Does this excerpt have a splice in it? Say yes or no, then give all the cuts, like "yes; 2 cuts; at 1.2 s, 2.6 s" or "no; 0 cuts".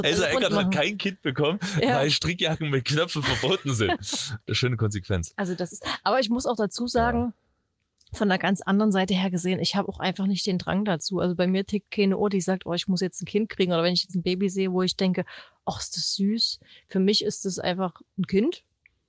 yes; 1 cut; at 4.5 s